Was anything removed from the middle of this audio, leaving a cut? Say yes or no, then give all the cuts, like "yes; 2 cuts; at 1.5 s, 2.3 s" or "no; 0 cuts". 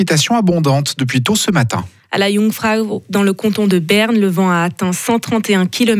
no; 0 cuts